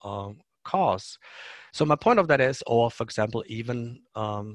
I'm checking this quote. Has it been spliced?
yes; 1 cut; at 1.7 s

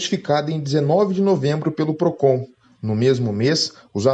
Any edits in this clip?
no; 0 cuts

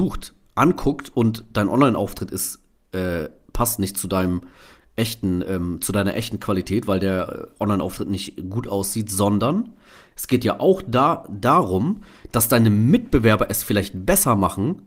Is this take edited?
no; 0 cuts

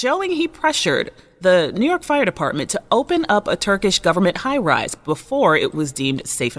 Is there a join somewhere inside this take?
no; 0 cuts

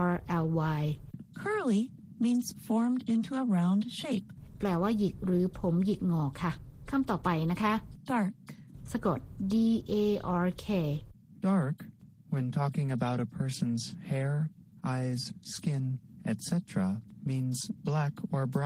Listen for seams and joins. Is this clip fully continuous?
no; 1 cut; at 8.0 s

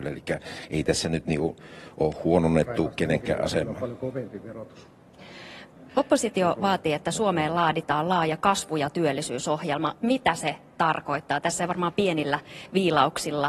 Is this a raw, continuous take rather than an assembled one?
yes; 0 cuts

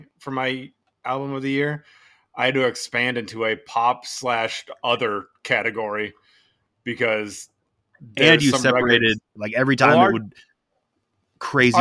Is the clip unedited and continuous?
no; 1 cut; at 9.4 s

